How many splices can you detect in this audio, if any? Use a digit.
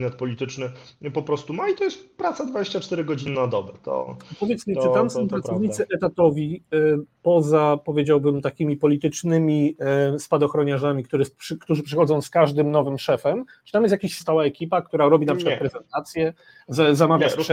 1